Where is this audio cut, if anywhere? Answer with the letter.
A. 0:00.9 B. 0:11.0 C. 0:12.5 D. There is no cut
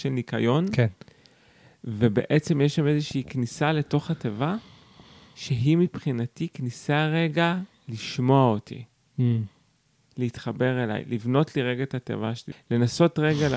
C